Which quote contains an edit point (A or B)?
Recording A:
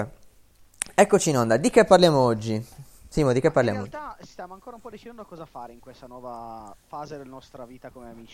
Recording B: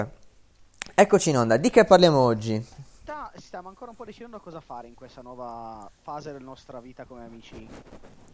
B